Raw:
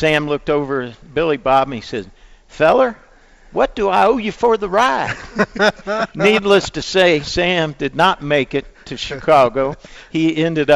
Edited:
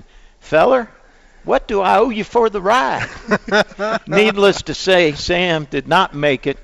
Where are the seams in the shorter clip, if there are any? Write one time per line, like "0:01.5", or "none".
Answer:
none